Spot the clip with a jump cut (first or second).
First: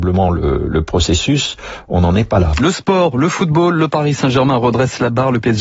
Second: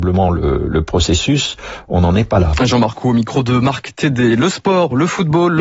first